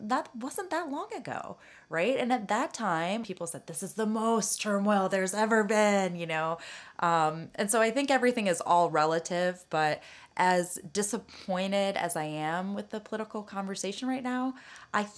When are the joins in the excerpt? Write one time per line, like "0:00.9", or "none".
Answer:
0:03.2